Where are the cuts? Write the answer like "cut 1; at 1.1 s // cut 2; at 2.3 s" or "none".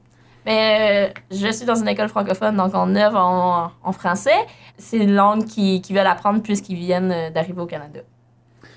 cut 1; at 4.7 s